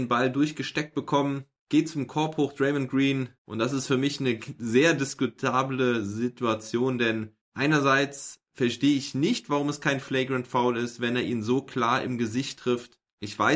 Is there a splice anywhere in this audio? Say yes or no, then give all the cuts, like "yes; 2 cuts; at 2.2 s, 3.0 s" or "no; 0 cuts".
yes; 1 cut; at 3.4 s